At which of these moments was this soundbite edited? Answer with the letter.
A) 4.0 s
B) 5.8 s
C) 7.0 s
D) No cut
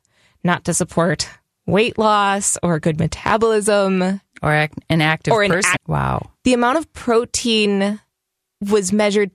B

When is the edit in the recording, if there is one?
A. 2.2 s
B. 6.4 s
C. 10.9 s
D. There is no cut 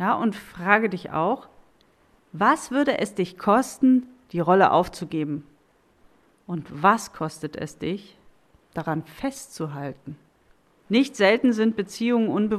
C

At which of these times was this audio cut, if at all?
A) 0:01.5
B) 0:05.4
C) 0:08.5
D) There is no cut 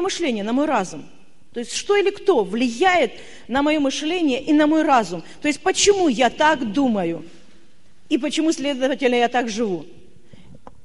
D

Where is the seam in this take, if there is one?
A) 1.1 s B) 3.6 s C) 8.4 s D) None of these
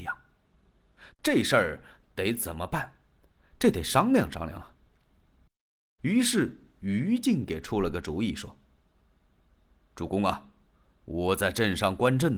A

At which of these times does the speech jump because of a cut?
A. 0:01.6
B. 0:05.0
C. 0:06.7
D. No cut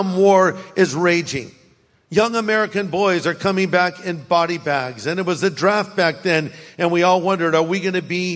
D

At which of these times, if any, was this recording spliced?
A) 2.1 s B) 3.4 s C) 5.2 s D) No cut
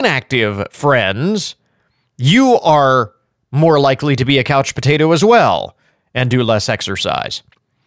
D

